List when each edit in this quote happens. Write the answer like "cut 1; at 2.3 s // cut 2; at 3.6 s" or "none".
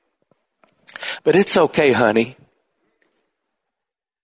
cut 1; at 1.2 s